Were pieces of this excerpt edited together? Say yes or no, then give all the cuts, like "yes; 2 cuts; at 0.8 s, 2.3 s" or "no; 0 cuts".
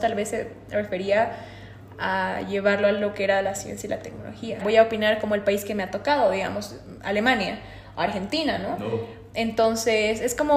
yes; 1 cut; at 4.6 s